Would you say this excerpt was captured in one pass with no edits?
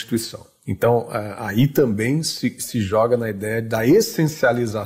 yes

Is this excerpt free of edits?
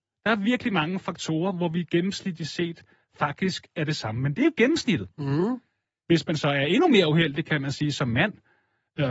no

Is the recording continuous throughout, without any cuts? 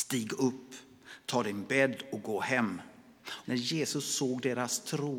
no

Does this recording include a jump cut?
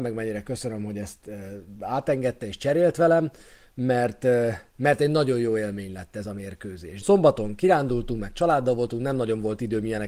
yes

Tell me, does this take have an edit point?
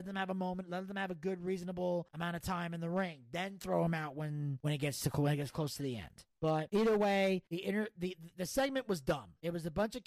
no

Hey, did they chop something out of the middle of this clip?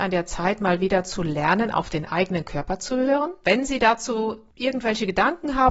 yes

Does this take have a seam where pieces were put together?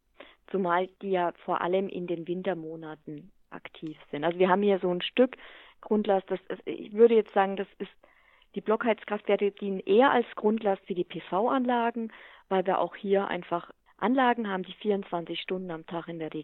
yes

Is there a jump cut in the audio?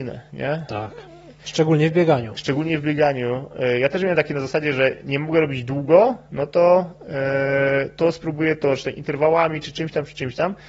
no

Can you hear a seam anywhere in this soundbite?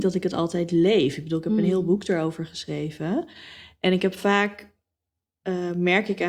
no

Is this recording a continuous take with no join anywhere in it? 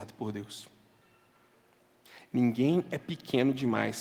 yes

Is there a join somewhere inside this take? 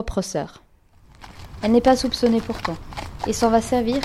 no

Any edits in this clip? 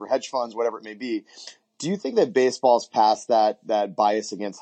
no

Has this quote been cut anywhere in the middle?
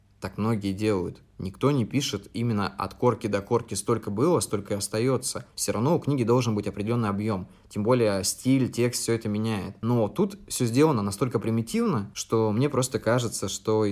no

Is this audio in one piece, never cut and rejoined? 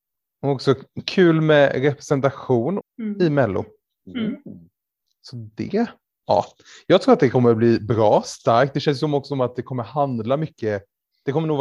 no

